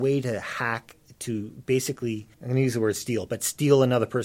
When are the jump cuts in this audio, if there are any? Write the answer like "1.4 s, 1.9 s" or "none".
2.3 s

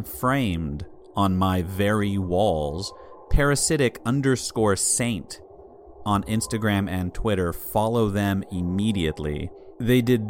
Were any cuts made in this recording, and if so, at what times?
none

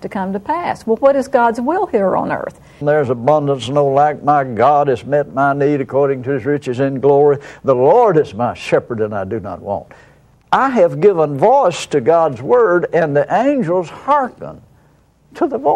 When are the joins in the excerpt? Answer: 2.8 s

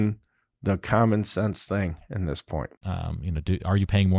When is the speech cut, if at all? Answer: 2.8 s

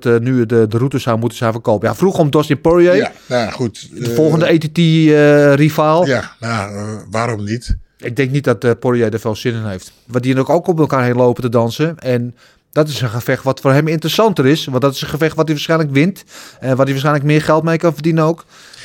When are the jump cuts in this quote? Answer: 10.1 s

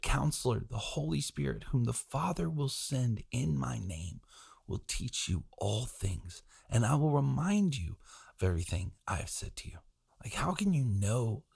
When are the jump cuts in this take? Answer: 10.1 s

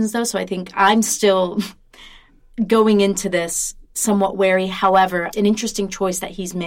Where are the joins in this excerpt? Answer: 3.8 s, 5.3 s

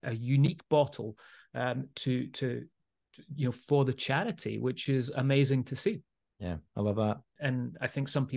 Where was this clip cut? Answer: 7.4 s

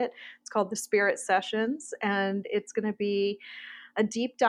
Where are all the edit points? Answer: none

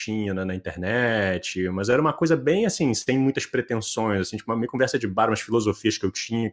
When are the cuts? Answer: none

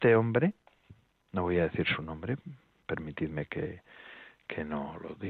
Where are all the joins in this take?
none

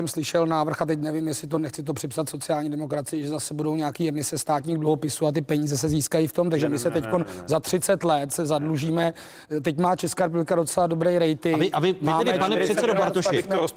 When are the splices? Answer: none

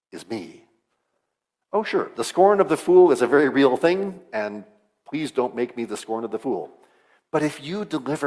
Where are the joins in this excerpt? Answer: none

